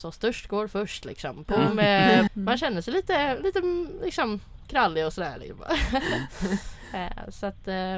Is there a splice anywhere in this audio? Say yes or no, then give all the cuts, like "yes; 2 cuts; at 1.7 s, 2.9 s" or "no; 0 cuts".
yes; 2 cuts; at 2.3 s, 5.7 s